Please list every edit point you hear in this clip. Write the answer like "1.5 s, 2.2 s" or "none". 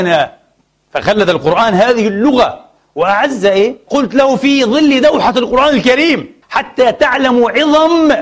3.9 s, 6.4 s